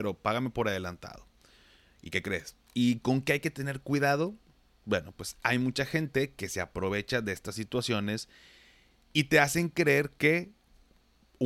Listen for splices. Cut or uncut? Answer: cut